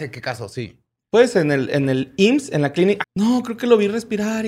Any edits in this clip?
yes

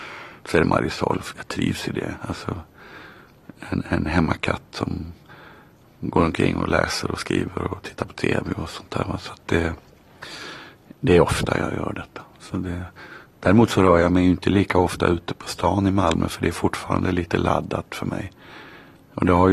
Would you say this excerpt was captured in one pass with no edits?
no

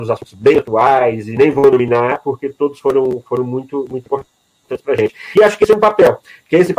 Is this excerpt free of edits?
yes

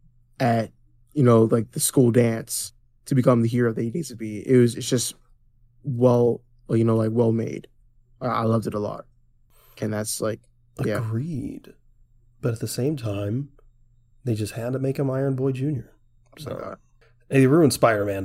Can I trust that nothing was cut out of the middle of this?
yes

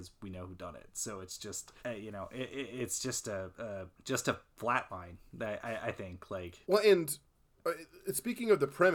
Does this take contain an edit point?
yes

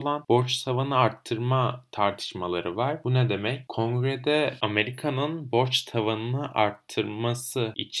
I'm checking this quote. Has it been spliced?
no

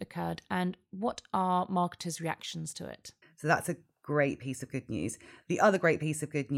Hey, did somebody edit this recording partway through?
yes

